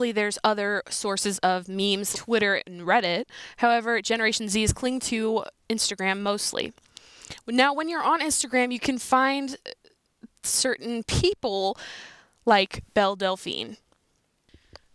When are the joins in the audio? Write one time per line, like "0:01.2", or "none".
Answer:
0:02.1